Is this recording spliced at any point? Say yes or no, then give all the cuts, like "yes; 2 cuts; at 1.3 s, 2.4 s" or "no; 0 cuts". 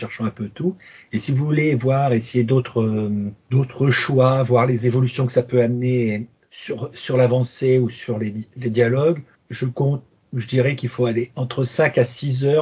yes; 1 cut; at 3.4 s